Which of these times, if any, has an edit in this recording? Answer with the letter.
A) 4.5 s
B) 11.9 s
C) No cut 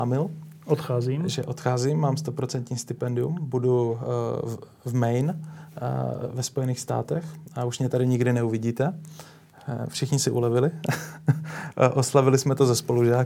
C